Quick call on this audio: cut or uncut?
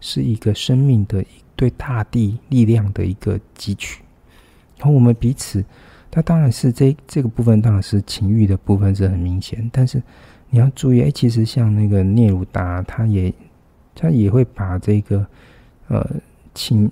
uncut